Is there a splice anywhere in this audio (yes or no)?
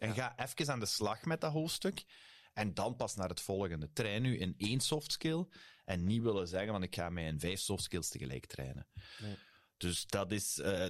no